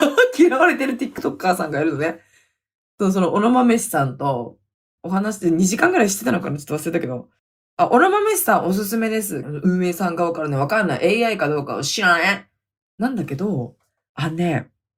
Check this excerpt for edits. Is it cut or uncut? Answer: cut